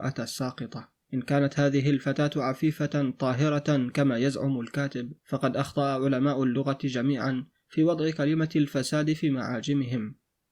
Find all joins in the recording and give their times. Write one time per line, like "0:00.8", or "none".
0:01.0
0:05.2